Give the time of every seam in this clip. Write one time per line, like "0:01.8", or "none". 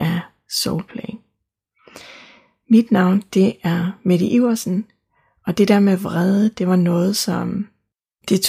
none